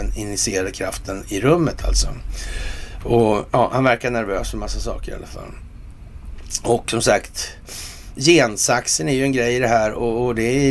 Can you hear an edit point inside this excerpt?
yes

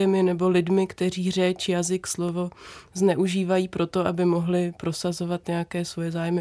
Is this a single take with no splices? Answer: yes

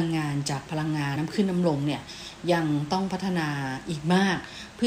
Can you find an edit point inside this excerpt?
yes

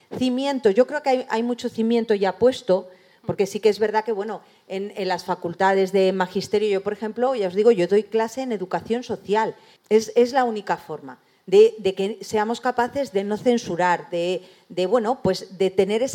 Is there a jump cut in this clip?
yes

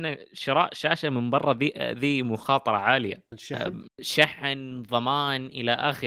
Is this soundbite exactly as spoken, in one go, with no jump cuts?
yes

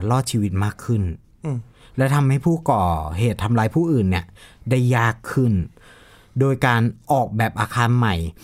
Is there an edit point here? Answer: no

